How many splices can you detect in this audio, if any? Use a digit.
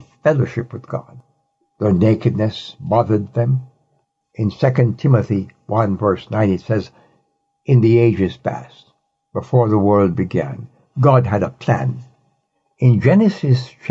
2